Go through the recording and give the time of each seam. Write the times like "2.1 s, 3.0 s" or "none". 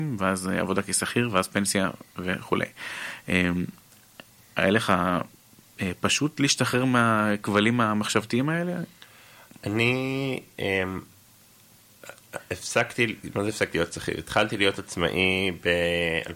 none